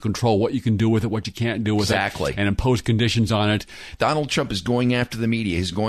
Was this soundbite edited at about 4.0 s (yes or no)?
yes